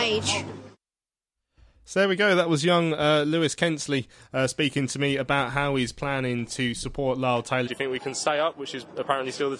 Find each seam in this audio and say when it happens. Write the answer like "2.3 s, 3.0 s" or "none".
7.7 s